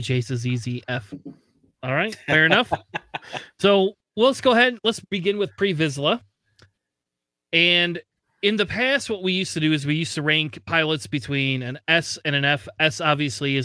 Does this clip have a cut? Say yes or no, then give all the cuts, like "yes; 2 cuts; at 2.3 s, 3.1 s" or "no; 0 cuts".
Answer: no; 0 cuts